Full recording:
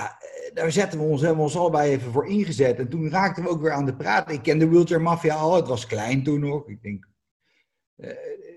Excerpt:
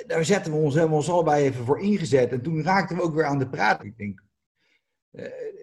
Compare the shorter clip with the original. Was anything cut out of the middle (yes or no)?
yes